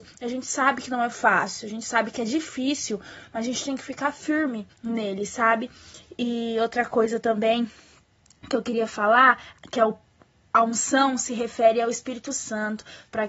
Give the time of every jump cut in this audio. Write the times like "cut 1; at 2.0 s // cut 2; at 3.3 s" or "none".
cut 1; at 4.7 s

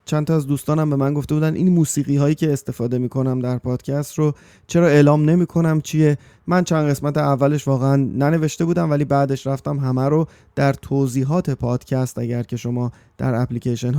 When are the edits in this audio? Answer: none

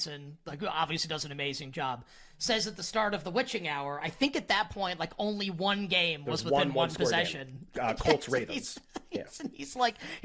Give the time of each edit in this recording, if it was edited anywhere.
none

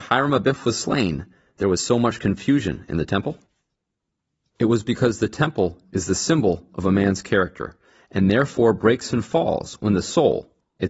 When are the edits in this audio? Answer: none

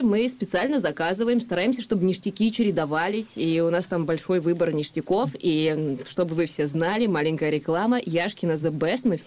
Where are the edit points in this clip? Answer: none

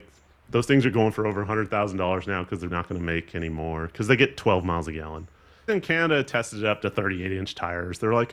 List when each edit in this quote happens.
cut 1; at 2.7 s // cut 2; at 5.7 s

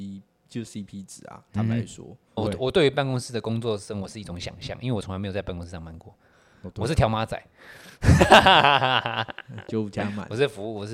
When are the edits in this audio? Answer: cut 1; at 2.4 s

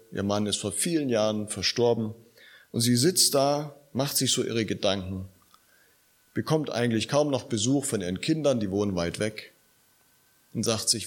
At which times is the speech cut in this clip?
none

